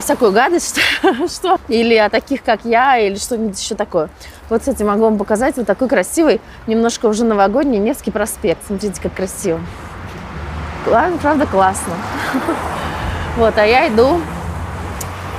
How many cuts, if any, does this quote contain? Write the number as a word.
one